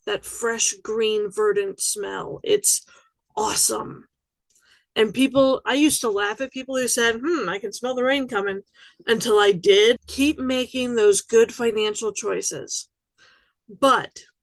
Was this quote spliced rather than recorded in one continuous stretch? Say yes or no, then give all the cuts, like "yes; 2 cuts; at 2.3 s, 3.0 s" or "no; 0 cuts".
yes; 1 cut; at 10.0 s